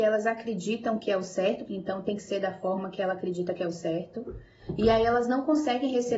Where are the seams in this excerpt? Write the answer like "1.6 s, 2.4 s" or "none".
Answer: 1.7 s